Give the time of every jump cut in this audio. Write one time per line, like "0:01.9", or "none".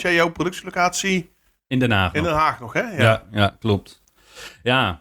none